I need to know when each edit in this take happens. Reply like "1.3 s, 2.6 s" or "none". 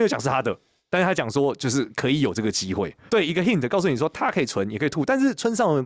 3.1 s